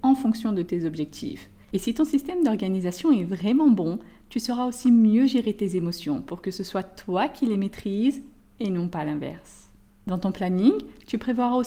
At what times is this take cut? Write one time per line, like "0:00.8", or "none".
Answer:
0:01.6